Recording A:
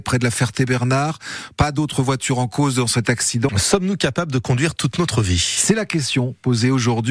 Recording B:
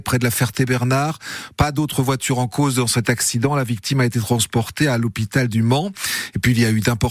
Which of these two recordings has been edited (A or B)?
A